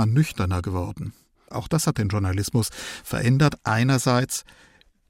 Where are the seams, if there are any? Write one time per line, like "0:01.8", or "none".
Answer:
0:01.5